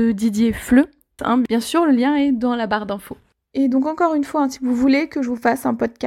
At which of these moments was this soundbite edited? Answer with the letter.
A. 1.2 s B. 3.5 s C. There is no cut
A